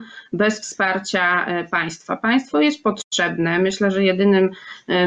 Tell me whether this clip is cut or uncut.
uncut